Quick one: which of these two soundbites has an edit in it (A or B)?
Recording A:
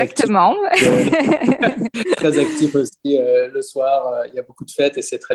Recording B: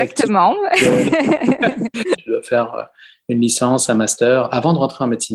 B